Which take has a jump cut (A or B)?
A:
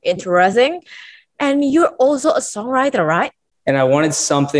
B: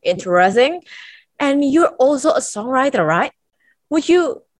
A